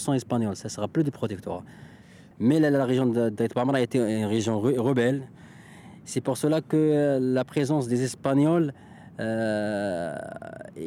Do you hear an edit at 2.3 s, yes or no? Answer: yes